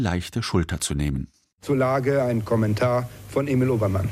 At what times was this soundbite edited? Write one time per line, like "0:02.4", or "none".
none